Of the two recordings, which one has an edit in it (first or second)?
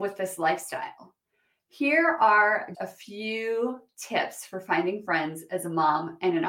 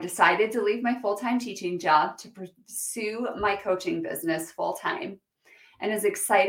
first